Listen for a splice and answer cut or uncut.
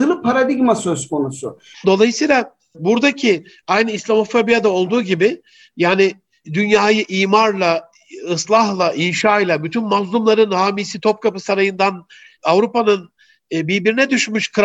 cut